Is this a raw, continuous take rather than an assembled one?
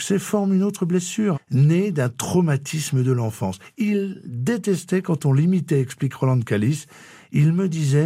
no; 1 cut; at 1.3 s

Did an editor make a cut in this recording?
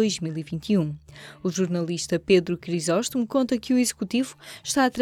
no; 0 cuts

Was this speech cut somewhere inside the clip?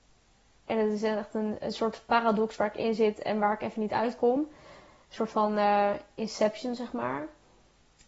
no; 0 cuts

